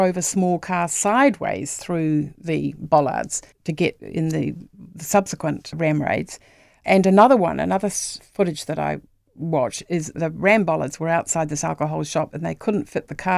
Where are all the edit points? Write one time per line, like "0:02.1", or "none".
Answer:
none